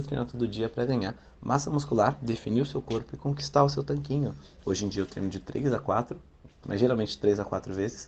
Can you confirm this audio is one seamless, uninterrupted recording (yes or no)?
no